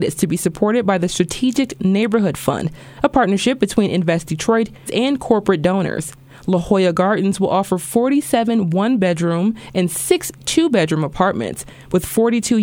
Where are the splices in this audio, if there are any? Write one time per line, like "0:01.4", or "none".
0:04.8